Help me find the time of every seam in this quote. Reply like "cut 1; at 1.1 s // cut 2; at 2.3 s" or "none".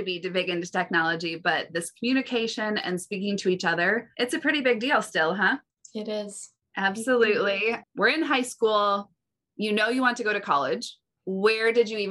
cut 1; at 7.8 s